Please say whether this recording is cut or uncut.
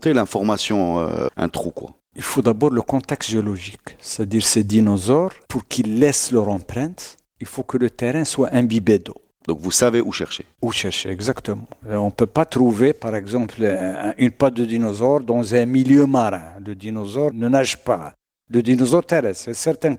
cut